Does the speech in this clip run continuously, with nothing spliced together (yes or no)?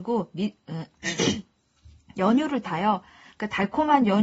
yes